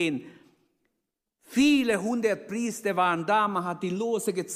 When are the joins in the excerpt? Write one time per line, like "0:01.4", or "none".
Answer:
0:01.3